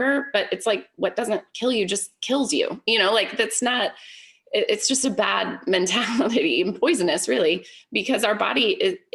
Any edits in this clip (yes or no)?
no